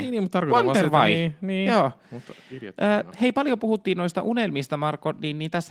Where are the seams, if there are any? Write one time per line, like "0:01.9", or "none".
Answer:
none